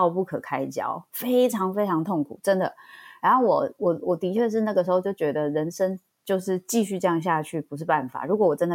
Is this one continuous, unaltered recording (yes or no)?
yes